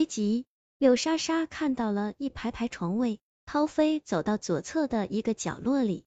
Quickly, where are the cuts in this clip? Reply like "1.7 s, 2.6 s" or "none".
none